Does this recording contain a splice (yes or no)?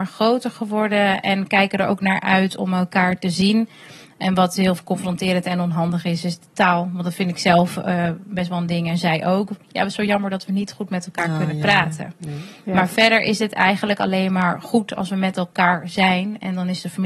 no